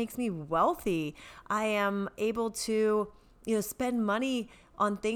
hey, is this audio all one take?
yes; 0 cuts

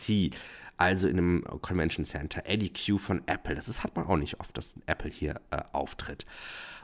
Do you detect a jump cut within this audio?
no; 0 cuts

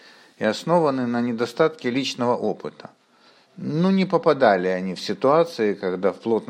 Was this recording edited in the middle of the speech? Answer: no; 0 cuts

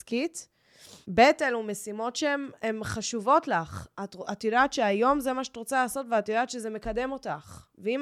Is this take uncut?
no; 1 cut; at 1.0 s

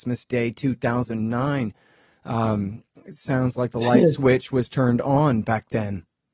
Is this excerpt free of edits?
yes; 0 cuts

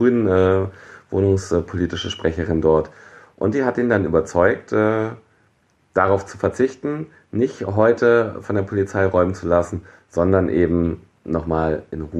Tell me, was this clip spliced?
no; 0 cuts

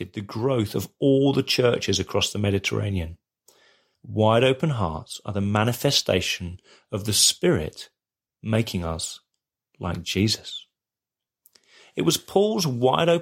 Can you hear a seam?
yes; 1 cut; at 3.9 s

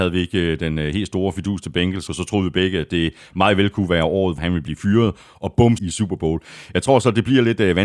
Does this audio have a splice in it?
yes; 3 cuts; at 2.1 s, 4.4 s, 5.8 s

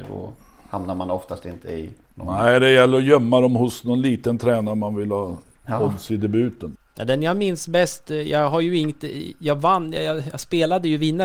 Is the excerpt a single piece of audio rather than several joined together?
yes; 0 cuts

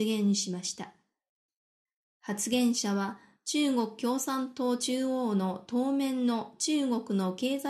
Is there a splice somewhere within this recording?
no; 0 cuts

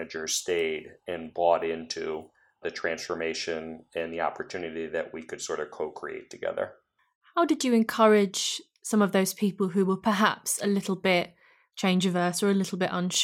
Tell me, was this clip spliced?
no; 0 cuts

